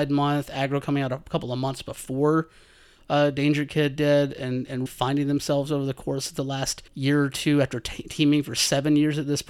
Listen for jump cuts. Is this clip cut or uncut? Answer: cut